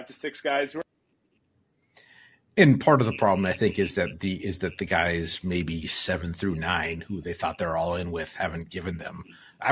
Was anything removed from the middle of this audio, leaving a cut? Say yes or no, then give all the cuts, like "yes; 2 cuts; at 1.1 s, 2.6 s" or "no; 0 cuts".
no; 0 cuts